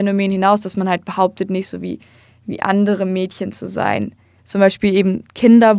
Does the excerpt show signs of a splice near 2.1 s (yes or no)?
no